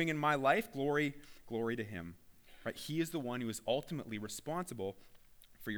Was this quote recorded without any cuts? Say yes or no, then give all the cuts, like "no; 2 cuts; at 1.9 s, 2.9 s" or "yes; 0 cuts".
yes; 0 cuts